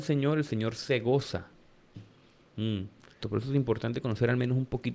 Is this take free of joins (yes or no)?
no